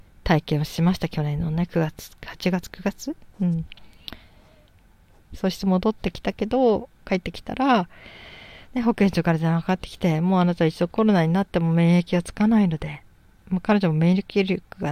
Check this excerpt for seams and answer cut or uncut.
uncut